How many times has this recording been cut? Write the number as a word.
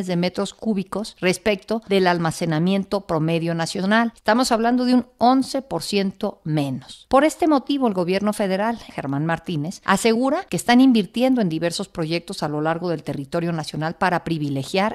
one